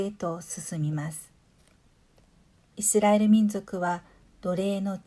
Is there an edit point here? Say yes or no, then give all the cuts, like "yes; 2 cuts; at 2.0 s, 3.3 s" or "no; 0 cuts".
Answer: yes; 1 cut; at 2.7 s